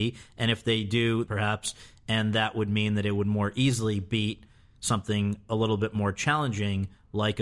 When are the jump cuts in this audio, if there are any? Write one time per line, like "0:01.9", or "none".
0:01.3